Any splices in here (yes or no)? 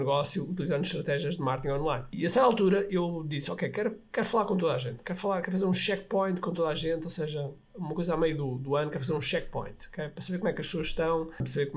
no